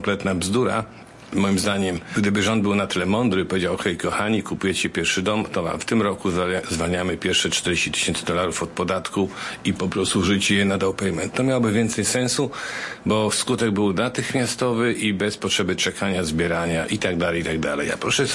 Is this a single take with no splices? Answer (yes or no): yes